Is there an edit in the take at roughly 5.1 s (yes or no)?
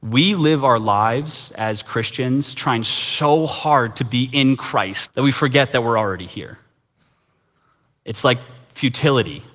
yes